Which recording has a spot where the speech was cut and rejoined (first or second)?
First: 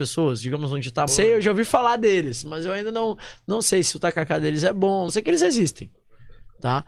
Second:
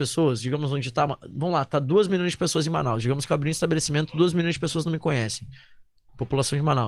first